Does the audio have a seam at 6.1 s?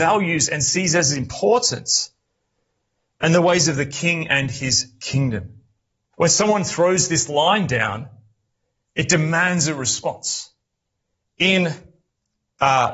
yes; 2 cuts; at 6.1 s, 11.2 s

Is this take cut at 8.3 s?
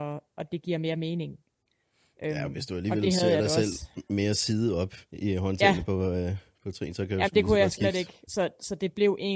yes; 2 cuts; at 5.1 s, 8.3 s

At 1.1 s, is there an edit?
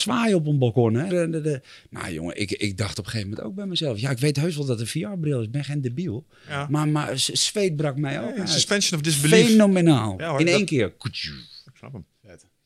yes; 1 cut; at 1.1 s

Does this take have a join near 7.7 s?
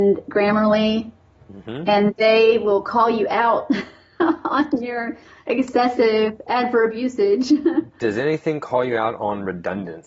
no; 0 cuts

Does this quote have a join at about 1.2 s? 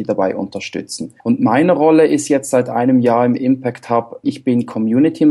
yes; 2 cuts; at 1.2 s, 4.2 s

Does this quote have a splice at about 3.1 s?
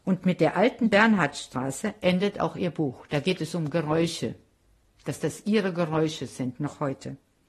no; 0 cuts

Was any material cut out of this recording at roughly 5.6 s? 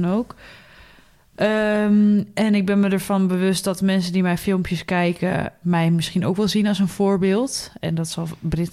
yes; 1 cut; at 5.6 s

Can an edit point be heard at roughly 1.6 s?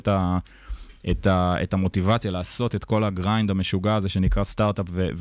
no; 0 cuts

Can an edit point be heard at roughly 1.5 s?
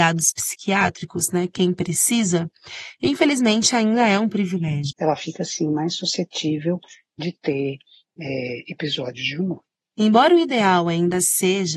no; 2 cuts; at 4.9 s, 9.9 s

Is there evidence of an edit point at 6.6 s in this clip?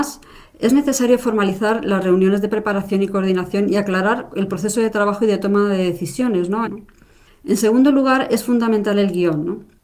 yes; 1 cut; at 6.6 s

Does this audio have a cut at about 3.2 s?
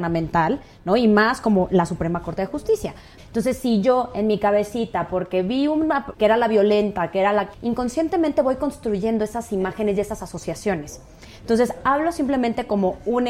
yes; 3 cuts; at 3.2 s, 6.1 s, 7.5 s

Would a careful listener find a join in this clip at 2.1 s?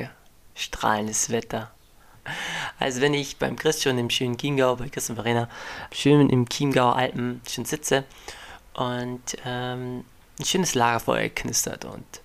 yes; 2 cuts; at 2.1 s, 5.9 s

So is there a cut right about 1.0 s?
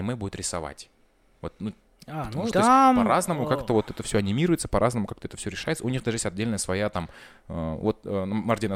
no; 1 cut; at 2.5 s

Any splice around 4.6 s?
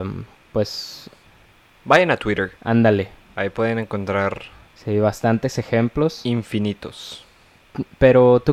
no; 1 cut; at 2.6 s

